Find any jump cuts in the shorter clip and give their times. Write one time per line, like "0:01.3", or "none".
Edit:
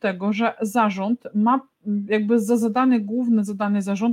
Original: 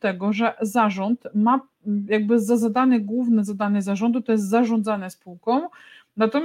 none